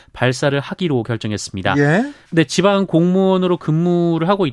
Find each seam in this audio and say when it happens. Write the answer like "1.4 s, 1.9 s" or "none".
2.3 s